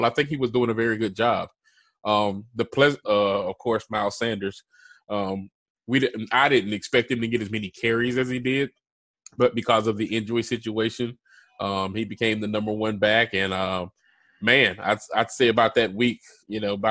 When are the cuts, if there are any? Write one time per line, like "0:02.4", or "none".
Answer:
0:03.0